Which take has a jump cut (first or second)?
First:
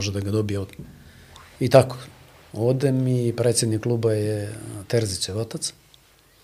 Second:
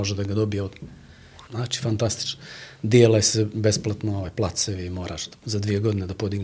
second